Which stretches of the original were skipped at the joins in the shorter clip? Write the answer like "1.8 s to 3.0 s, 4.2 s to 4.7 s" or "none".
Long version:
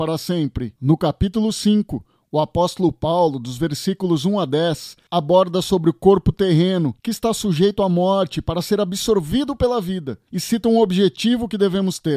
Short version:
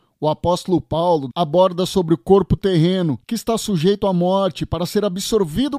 3.4 s to 5.1 s